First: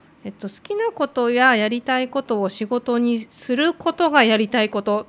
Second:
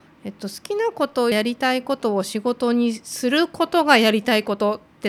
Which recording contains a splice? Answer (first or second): second